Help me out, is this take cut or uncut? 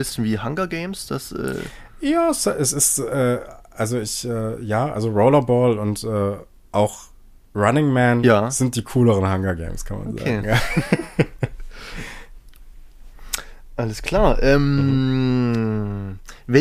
uncut